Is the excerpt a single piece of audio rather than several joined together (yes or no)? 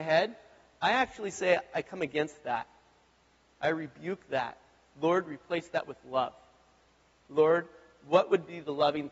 yes